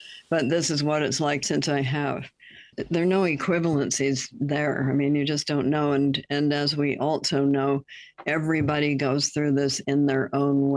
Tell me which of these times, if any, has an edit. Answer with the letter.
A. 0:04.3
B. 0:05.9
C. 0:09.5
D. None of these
D